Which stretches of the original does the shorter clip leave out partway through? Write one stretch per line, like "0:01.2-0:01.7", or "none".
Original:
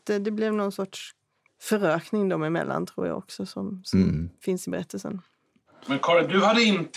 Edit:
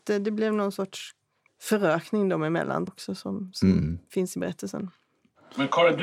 0:02.9-0:03.2

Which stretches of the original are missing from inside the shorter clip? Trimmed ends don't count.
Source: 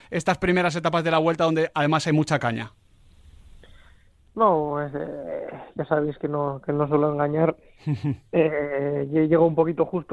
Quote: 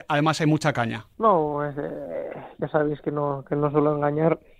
0:02.8-0:04.3

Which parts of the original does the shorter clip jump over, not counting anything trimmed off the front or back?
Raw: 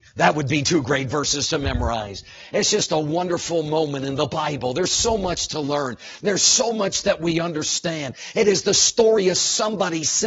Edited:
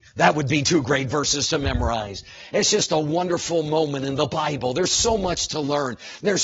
none

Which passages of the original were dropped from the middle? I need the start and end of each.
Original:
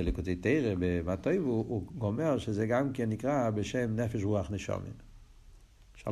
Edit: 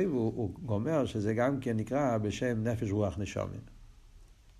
none

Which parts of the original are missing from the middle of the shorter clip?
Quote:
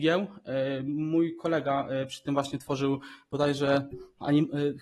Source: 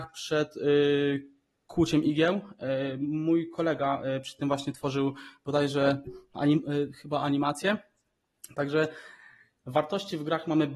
none

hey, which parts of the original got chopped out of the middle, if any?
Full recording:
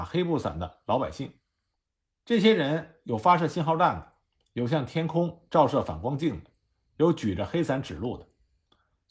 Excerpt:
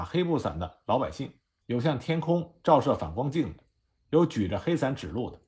0:01.6-0:04.5

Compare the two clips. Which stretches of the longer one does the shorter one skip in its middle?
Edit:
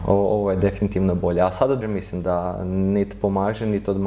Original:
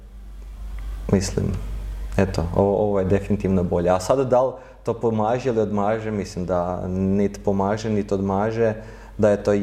0:04.3-0:06.0

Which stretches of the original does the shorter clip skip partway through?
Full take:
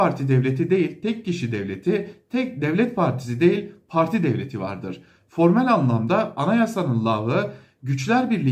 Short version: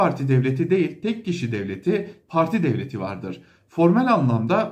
0:02.2-0:03.8

